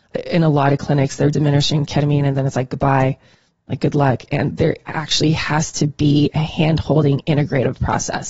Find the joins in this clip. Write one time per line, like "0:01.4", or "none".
0:01.3